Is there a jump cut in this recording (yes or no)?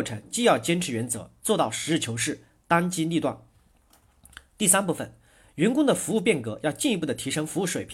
yes